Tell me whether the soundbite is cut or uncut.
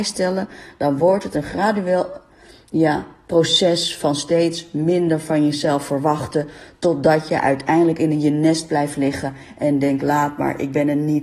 uncut